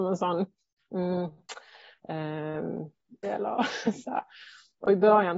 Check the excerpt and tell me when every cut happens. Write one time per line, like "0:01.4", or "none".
0:03.2